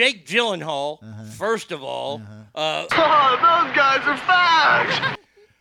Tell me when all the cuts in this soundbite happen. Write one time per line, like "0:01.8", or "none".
0:02.9